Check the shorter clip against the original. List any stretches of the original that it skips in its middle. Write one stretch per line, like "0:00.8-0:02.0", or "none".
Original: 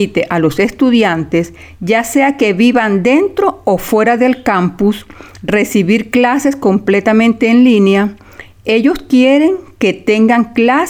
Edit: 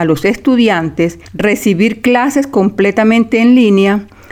0:01.6-0:05.3